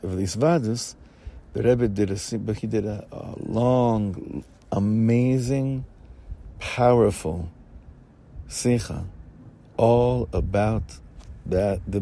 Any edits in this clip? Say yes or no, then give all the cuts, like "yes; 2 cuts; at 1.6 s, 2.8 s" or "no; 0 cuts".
no; 0 cuts